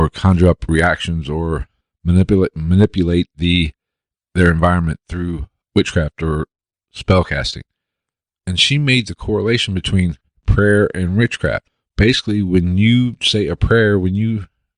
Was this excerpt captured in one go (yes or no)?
yes